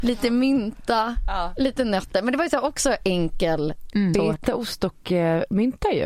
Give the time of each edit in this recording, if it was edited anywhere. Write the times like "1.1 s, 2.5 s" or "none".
4.1 s

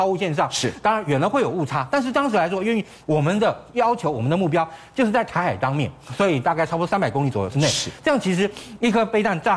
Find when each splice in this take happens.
7.5 s

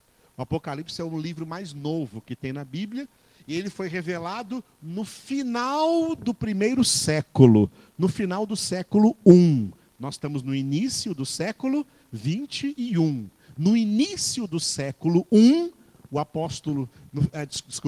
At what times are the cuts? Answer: none

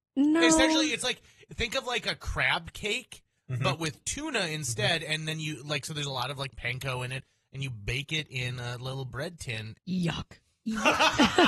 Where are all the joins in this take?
9.8 s

